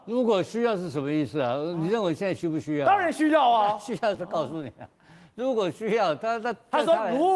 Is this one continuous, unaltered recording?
no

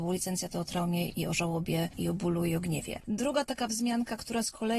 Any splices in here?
yes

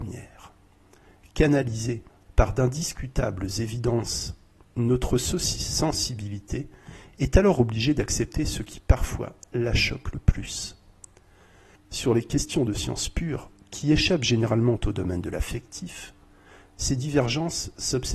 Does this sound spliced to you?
yes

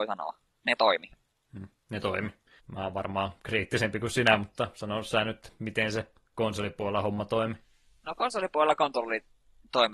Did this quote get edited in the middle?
yes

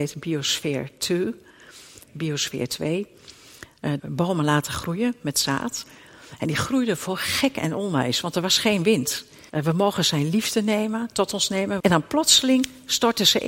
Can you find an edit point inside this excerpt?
yes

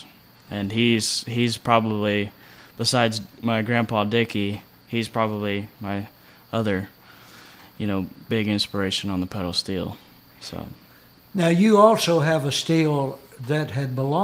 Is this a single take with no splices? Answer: yes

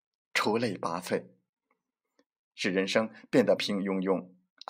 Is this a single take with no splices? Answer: no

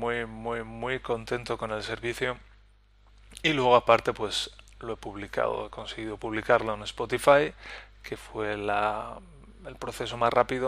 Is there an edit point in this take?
no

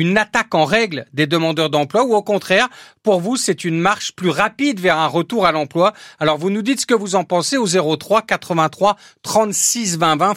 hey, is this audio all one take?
yes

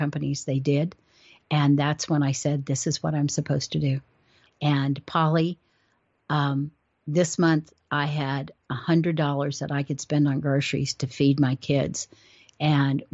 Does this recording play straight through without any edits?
no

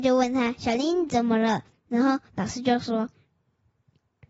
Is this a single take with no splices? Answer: yes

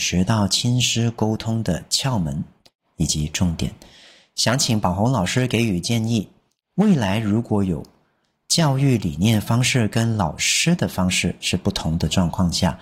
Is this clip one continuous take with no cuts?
yes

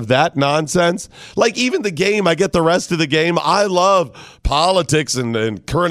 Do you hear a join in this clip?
no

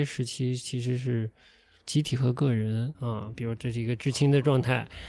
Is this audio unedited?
no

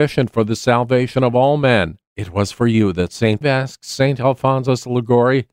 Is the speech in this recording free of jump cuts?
no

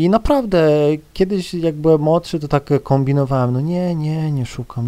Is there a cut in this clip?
no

